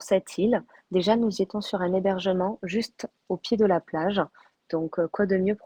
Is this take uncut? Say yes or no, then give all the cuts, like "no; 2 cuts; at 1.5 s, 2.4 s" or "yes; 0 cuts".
yes; 0 cuts